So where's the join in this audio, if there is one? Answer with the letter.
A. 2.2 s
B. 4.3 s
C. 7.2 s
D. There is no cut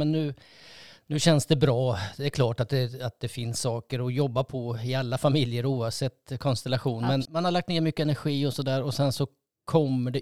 C